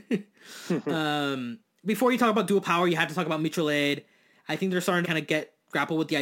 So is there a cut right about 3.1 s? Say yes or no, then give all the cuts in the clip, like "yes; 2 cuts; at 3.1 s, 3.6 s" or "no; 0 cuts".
no; 2 cuts; at 1.8 s, 5.0 s